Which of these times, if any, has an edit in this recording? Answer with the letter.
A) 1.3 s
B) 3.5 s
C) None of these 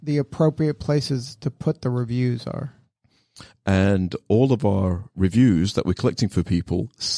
B